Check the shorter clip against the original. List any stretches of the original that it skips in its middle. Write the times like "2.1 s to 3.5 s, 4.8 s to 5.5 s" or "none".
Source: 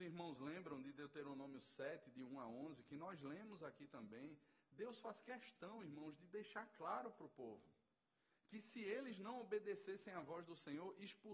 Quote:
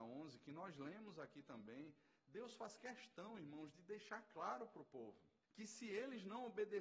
7.9 s to 8.4 s

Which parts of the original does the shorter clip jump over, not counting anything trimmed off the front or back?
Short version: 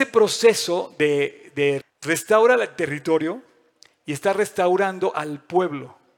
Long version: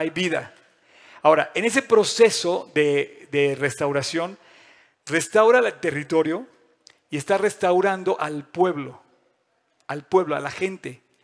3.6 s to 4.9 s

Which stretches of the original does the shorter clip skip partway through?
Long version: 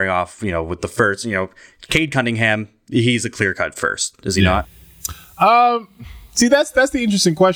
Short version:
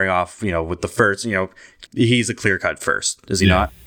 1.9 s to 2.8 s

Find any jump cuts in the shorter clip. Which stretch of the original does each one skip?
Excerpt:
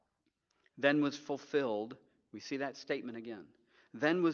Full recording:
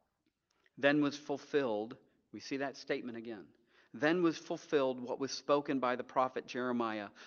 none

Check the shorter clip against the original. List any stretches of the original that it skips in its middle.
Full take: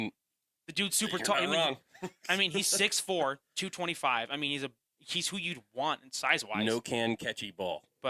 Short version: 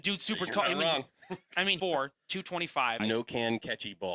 2.5 s to 3.1 s, 4.3 s to 6.6 s

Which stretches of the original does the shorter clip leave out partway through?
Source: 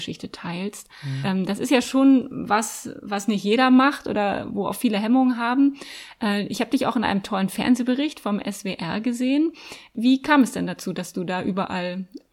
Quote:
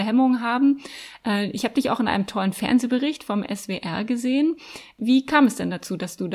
none

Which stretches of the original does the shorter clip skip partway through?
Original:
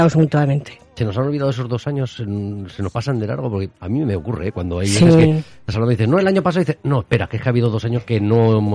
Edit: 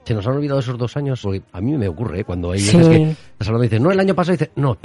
2.1 s to 3.5 s

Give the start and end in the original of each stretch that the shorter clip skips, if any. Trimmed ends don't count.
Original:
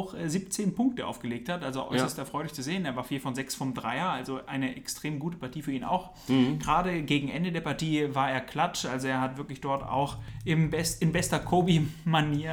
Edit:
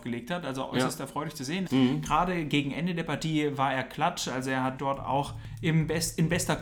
2.8 s to 6.2 s, 9.3 s to 9.6 s

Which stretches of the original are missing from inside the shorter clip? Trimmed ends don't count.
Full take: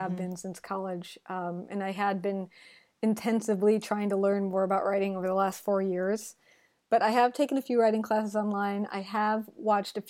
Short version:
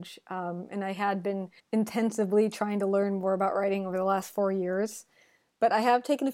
2.6 s to 2.9 s

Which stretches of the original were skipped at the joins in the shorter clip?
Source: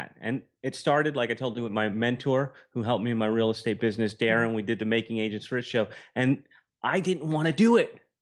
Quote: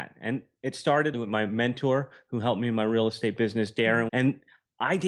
1.1 s to 1.6 s, 4.5 s to 6.1 s

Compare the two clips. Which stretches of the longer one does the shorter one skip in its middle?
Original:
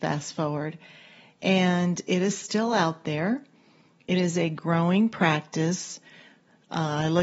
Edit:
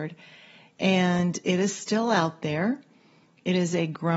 none

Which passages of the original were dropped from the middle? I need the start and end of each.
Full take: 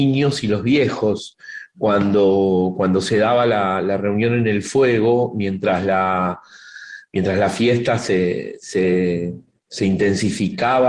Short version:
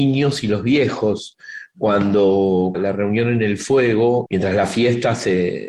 2.7 s to 3.8 s, 5.3 s to 7.1 s

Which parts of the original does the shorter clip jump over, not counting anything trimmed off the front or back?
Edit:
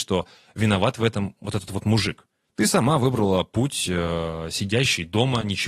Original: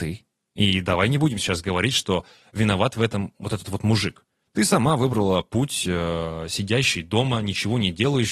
none

